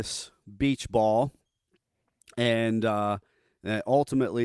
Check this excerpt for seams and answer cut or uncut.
uncut